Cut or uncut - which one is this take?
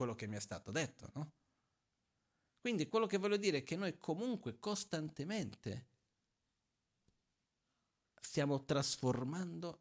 uncut